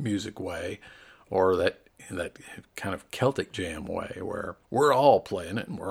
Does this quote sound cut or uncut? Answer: cut